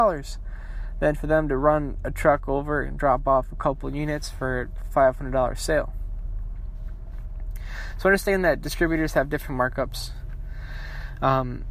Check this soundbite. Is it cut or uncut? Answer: uncut